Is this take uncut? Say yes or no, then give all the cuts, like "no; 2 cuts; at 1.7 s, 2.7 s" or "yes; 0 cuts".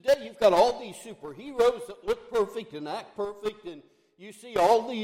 yes; 0 cuts